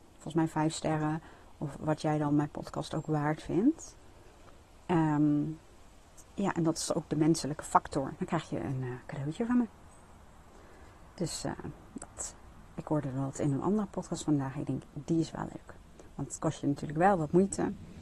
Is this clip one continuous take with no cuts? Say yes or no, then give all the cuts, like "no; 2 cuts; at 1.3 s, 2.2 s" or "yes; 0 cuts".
no; 2 cuts; at 6.3 s, 8.2 s